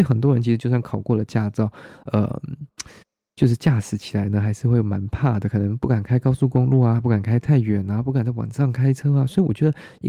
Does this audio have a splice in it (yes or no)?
no